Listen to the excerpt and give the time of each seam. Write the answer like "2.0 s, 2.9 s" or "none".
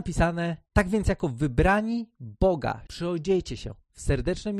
2.9 s